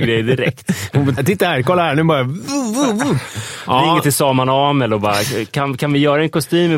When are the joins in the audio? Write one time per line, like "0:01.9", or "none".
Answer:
0:01.2